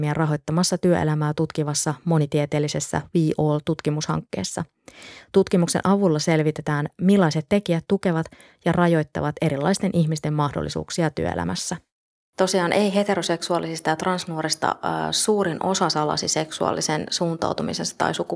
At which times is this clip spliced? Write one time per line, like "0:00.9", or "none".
none